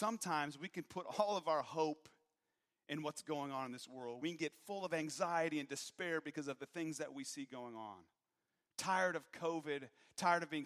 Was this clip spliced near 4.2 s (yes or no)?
no